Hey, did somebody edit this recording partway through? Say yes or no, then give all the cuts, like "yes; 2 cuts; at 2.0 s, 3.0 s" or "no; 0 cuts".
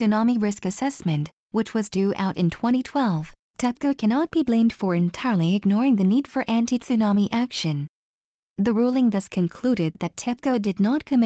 no; 0 cuts